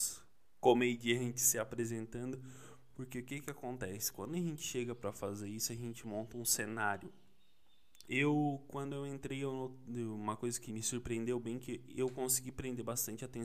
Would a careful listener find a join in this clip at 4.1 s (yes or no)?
no